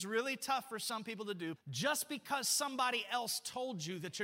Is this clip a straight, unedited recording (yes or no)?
no